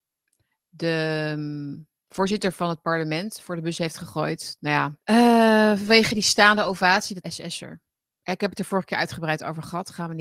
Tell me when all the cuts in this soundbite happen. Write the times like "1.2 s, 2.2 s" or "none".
5.0 s, 7.2 s